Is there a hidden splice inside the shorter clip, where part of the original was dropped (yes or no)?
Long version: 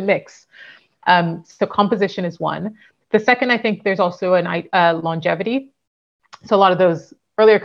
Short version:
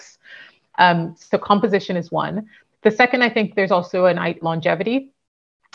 yes